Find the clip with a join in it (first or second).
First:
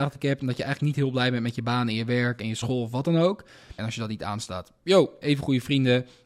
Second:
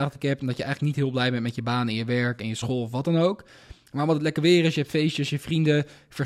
first